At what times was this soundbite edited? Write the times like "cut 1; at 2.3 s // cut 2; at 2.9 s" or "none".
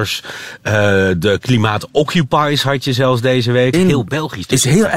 cut 1; at 3.7 s